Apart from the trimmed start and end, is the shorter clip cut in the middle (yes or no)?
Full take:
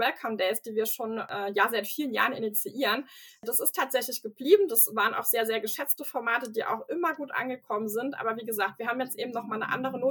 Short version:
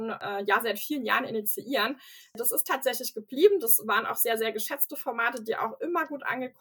no